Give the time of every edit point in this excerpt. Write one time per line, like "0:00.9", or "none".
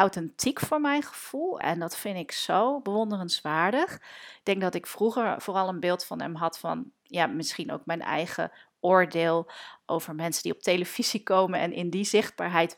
0:01.6